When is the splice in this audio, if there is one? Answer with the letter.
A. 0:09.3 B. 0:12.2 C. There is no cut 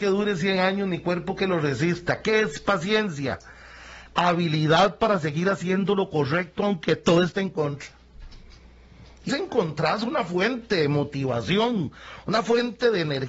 A